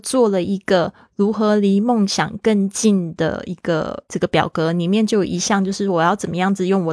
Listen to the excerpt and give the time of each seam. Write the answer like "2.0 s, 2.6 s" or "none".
4.0 s